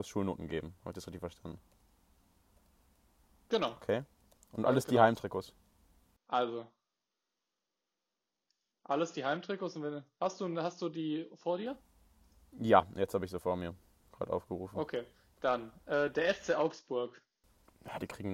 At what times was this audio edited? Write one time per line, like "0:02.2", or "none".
none